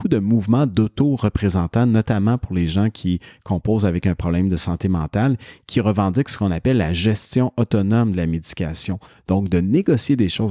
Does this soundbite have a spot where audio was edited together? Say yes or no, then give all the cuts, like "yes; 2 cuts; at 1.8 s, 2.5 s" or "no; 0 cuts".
no; 0 cuts